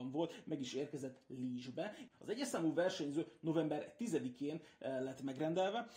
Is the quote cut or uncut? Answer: cut